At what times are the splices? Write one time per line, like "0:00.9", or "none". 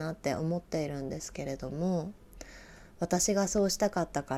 none

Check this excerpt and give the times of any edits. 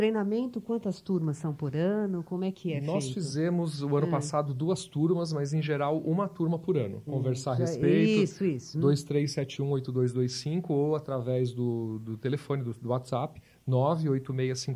0:07.1
0:08.7

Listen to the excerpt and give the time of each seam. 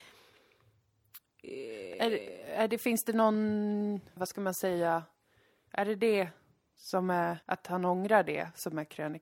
0:04.2
0:07.4

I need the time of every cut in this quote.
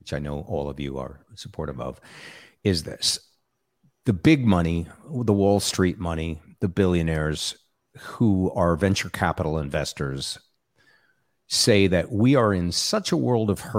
none

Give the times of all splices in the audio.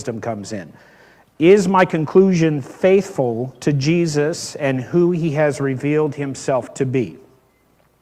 0:01.2

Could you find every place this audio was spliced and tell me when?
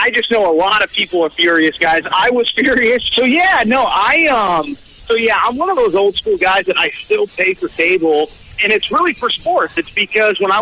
0:03.1
0:08.6

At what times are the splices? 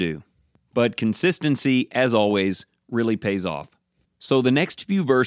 0:04.0

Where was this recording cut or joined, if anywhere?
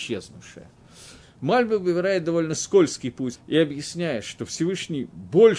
0:01.2
0:03.3

